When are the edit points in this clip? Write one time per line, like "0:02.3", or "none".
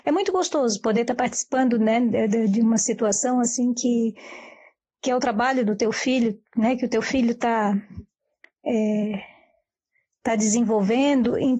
none